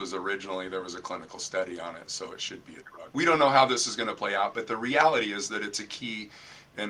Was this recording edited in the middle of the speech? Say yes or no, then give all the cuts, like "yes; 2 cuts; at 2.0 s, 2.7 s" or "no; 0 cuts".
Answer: yes; 1 cut; at 3.1 s